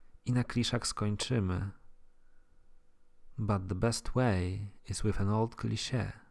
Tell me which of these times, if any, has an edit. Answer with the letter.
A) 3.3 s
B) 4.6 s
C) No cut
C